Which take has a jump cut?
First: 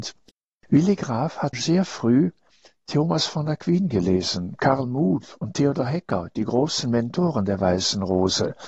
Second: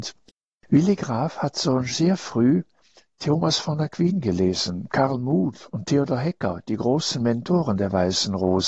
first; 1 cut; at 1.5 s

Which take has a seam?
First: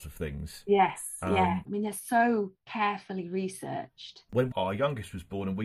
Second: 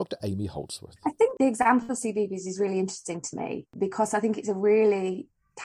first; 2 cuts; at 1.7 s, 4.3 s

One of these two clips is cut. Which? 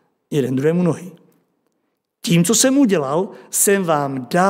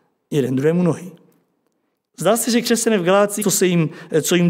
second; 2 cuts; at 2.1 s, 3.4 s

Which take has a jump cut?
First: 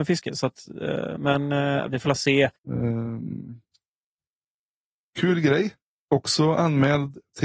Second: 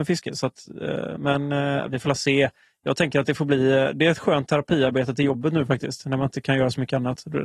first; 1 cut; at 2.6 s

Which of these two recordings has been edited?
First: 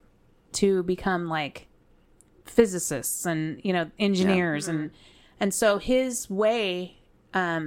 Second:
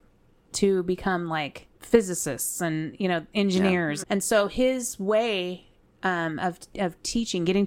second; 2 cuts; at 1.7 s, 4.0 s

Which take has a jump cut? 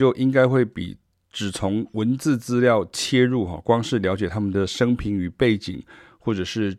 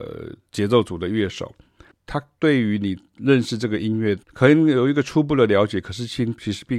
second; 2 cuts; at 1.9 s, 4.2 s

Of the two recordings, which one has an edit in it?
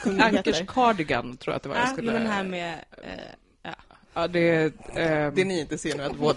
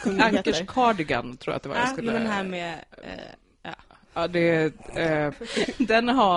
second; 1 cut; at 5.3 s

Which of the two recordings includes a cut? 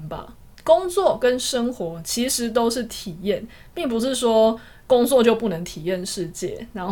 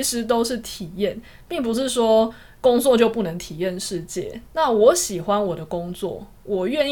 second; 1 cut; at 4.4 s

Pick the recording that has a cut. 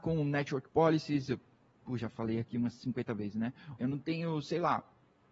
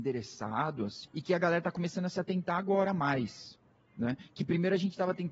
first; 1 cut; at 3.8 s

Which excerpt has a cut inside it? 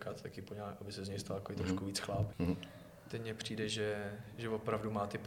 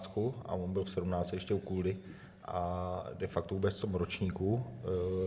first; 1 cut; at 2.3 s

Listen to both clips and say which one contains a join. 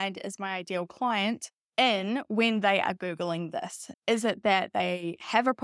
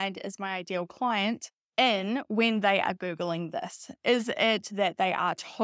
first; 1 cut; at 3.9 s

